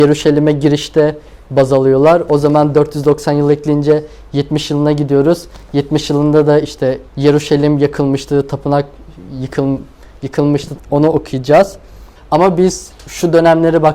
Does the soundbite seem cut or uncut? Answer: cut